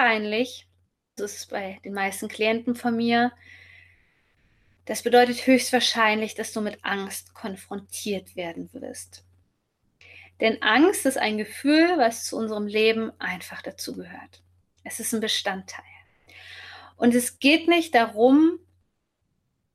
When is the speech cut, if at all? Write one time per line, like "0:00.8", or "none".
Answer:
0:01.2